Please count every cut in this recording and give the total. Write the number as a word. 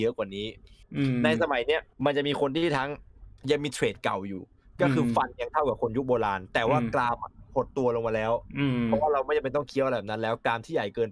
two